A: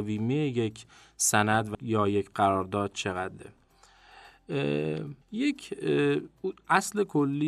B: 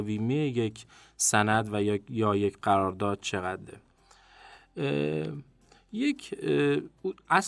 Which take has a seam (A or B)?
A